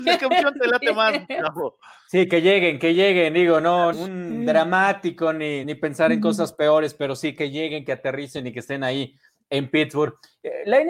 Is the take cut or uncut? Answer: cut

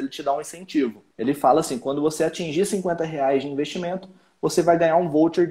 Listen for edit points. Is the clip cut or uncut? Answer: cut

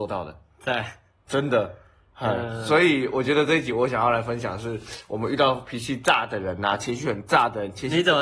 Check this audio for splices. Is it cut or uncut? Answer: uncut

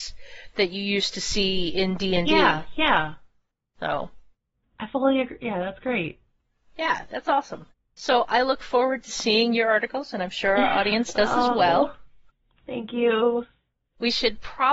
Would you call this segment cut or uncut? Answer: uncut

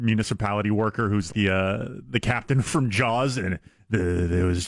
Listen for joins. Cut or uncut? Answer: cut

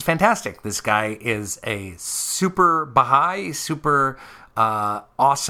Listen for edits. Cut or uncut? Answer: uncut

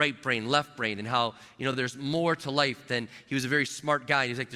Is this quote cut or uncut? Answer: uncut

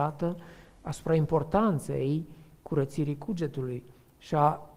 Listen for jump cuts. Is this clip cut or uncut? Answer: uncut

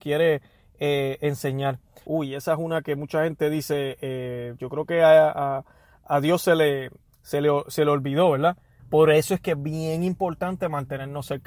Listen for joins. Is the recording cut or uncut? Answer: cut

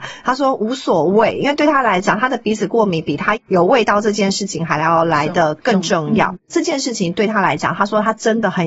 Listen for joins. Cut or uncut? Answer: uncut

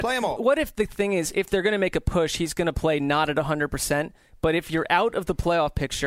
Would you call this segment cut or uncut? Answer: uncut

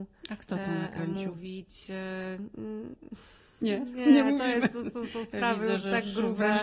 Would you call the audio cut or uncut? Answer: uncut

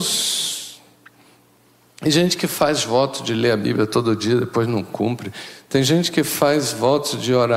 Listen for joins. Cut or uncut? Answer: uncut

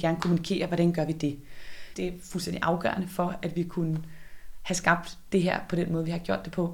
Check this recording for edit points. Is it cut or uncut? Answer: cut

